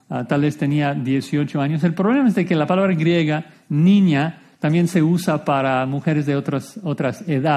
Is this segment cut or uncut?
uncut